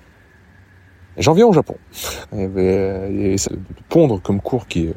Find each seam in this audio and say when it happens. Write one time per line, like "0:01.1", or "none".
0:02.2
0:03.4